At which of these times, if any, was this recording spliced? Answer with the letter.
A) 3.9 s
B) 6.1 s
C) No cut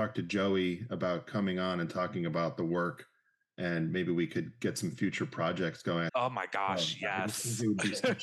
B